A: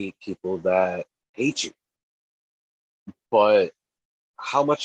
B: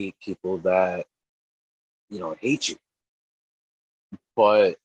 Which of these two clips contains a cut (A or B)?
A